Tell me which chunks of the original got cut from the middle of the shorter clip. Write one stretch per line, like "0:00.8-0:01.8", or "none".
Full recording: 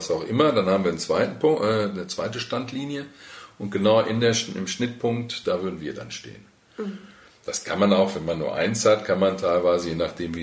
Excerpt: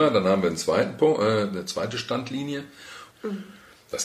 0:03.5-0:06.6

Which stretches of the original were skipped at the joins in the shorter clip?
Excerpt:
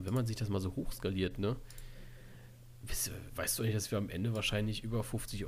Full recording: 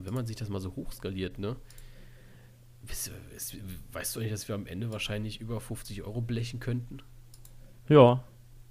0:03.3-0:03.9

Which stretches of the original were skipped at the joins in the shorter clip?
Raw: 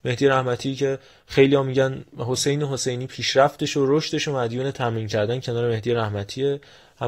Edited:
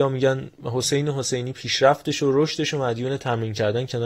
none

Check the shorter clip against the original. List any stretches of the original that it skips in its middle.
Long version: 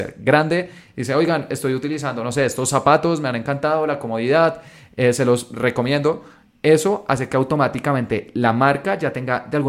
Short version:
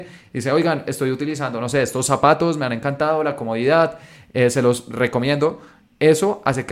none

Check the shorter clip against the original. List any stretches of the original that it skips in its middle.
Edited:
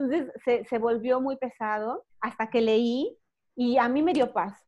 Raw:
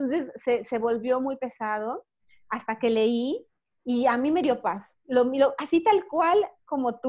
0:02.1-0:02.4

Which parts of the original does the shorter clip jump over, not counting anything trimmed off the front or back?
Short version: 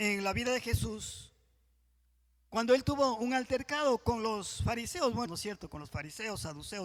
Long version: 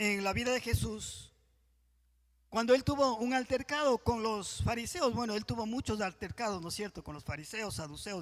0:05.3-0:06.6

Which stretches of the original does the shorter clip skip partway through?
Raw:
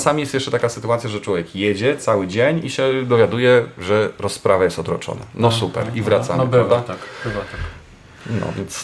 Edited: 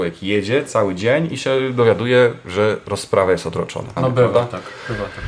0:05.3-0:06.3

